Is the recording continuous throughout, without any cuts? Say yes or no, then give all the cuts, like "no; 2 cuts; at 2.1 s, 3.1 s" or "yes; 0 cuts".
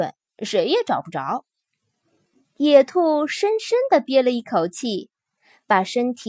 no; 1 cut; at 2.4 s